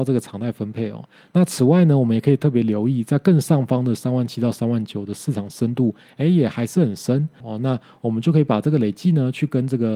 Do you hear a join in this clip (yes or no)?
yes